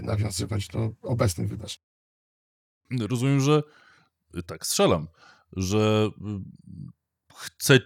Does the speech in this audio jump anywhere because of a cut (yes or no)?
no